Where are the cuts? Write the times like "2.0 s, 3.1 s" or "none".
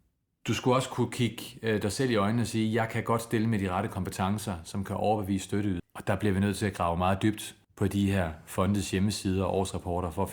5.8 s, 7.6 s